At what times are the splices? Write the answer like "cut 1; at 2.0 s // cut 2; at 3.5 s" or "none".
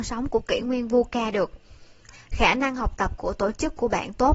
cut 1; at 2.1 s